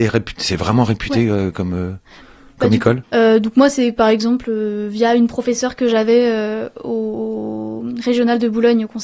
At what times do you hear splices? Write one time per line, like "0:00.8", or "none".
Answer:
0:03.0